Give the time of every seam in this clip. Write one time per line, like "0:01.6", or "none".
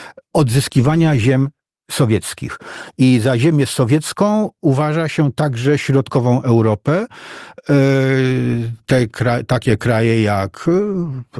none